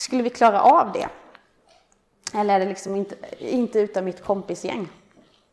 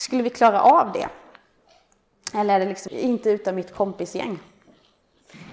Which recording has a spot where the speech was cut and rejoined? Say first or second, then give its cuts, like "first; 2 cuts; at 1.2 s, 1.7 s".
second; 1 cut; at 2.9 s